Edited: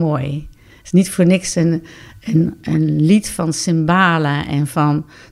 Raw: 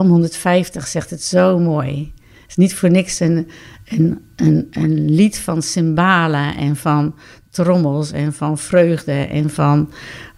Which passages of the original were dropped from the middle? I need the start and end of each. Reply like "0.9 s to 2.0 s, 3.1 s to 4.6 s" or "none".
4.3 s to 4.7 s